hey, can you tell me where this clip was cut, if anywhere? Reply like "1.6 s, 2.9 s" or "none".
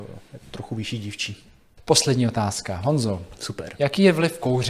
none